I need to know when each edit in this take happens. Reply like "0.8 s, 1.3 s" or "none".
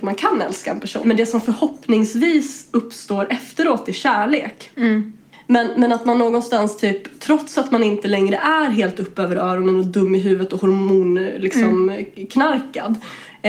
1.0 s